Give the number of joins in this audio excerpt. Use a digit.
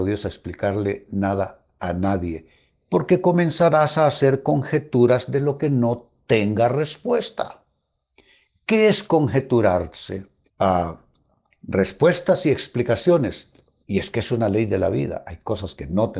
3